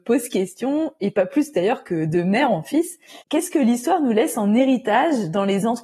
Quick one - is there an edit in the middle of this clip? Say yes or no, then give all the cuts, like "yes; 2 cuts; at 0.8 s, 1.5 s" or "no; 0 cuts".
yes; 1 cut; at 3.2 s